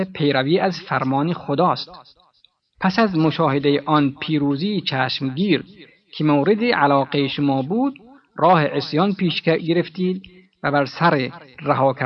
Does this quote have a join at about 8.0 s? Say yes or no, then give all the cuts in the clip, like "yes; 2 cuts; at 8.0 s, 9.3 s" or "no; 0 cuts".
no; 1 cut; at 2.7 s